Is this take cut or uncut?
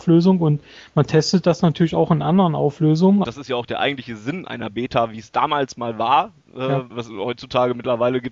cut